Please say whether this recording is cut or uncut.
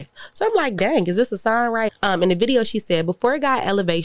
cut